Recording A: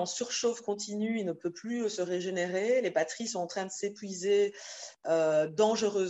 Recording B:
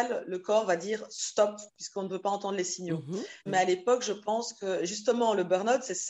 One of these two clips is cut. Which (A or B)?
B